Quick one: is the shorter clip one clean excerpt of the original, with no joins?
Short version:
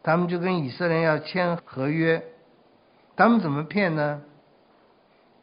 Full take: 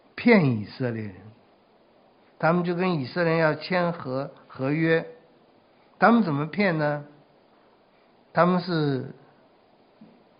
no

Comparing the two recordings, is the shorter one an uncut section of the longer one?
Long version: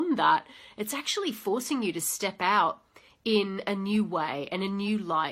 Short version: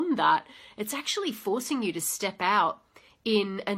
yes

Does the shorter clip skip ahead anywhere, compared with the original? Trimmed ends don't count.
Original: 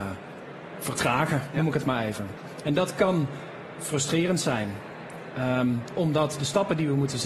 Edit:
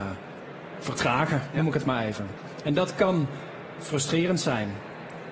no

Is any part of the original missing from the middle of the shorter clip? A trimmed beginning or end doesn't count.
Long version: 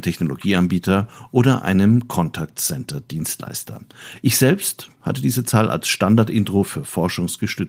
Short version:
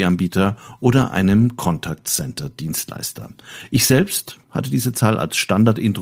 no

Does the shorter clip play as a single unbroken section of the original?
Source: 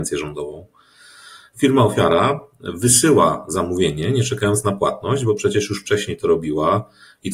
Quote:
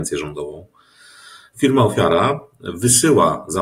yes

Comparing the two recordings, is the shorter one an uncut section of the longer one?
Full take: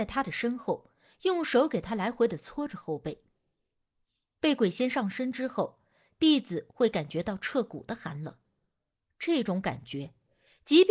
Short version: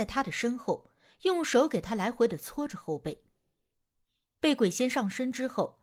yes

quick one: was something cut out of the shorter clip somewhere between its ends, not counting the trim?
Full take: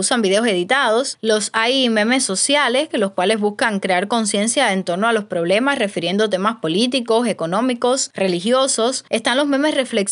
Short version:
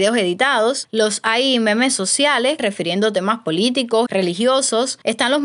yes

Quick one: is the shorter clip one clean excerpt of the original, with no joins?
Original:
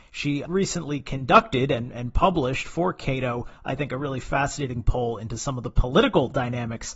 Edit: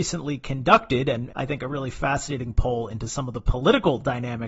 no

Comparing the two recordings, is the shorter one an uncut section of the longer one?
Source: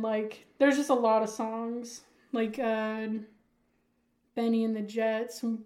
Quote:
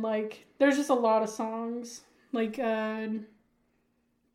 yes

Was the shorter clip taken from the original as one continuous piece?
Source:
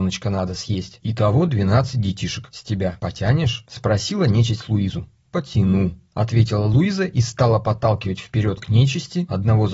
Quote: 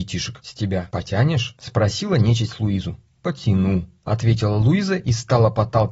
yes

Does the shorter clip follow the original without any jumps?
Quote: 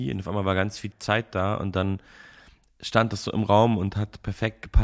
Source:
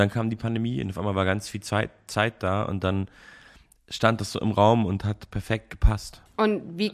no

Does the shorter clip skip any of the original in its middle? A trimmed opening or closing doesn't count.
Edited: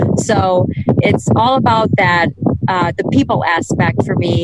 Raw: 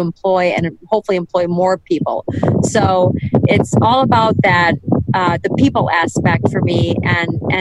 no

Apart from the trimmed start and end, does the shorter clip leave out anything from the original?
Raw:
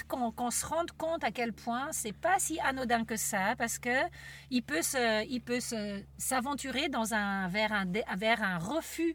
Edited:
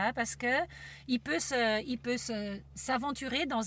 no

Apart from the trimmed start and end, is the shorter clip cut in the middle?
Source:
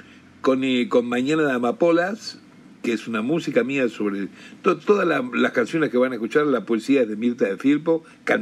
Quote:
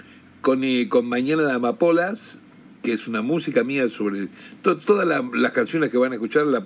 no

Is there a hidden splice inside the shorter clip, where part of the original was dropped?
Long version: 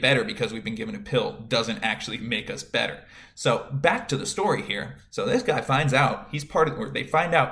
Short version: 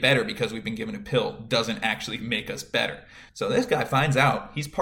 yes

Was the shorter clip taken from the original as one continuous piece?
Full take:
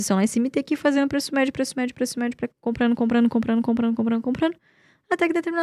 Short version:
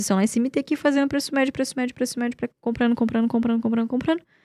no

